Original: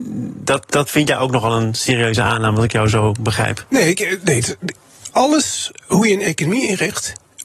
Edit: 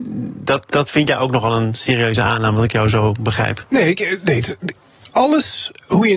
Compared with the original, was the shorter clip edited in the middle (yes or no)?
no